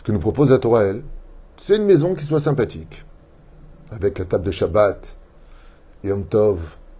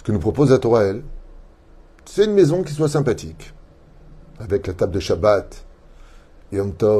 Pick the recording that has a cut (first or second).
first